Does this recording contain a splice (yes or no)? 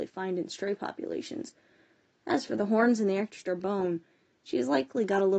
no